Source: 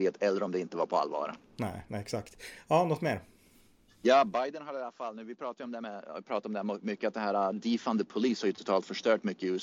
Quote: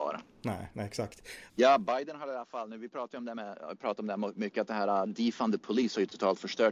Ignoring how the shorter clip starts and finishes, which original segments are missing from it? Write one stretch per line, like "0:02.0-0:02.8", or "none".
0:02.6-0:04.0